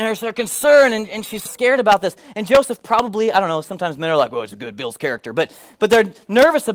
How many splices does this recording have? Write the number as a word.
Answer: one